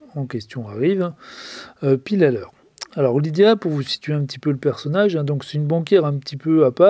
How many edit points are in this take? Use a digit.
0